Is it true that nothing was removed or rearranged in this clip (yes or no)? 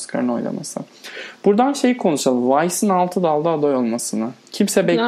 yes